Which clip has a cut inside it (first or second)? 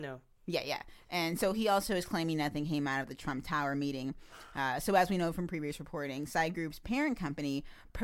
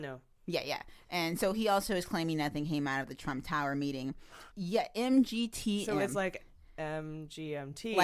second